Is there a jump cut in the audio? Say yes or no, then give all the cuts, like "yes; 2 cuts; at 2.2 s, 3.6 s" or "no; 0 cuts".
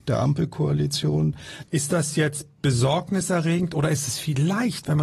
yes; 1 cut; at 1.7 s